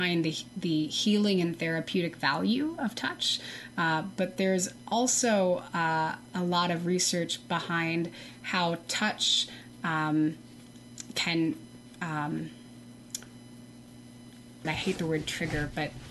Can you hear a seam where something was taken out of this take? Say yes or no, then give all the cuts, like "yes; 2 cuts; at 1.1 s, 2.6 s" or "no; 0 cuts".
yes; 1 cut; at 14.6 s